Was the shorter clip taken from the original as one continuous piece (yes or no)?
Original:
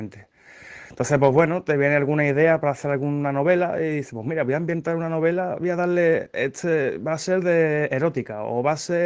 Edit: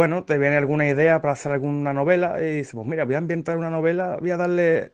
yes